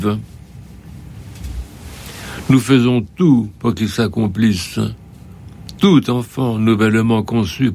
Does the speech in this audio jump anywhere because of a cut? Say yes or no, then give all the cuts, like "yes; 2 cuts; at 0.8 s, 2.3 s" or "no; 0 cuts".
no; 0 cuts